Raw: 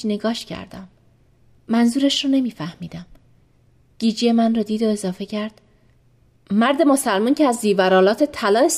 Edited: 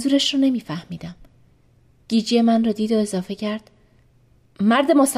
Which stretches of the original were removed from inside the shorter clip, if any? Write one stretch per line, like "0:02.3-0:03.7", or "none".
none